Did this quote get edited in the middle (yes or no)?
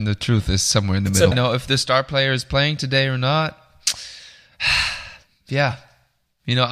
yes